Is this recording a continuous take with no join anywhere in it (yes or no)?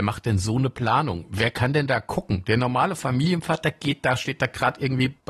yes